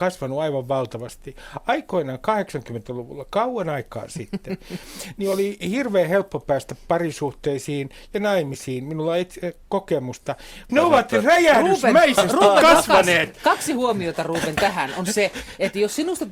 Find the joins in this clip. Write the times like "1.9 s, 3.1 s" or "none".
10.7 s